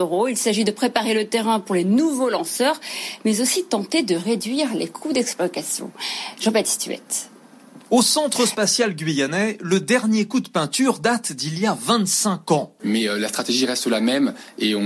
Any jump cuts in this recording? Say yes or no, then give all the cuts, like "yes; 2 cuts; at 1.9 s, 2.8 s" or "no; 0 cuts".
yes; 2 cuts; at 7.8 s, 12.8 s